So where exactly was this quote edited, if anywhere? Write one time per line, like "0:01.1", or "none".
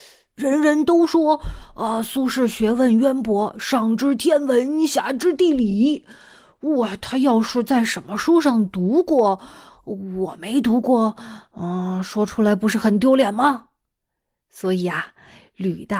none